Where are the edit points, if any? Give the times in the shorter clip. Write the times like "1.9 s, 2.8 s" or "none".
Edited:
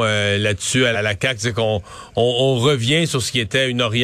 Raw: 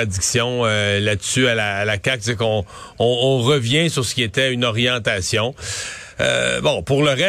0.9 s